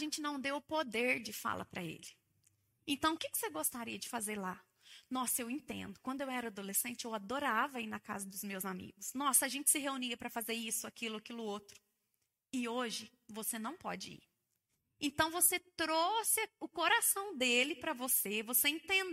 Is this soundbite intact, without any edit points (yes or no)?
no